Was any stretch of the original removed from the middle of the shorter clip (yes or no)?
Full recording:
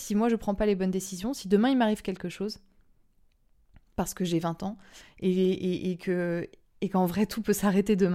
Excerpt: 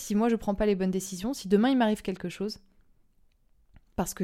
no